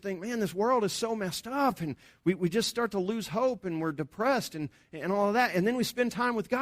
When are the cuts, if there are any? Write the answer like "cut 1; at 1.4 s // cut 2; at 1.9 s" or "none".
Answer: none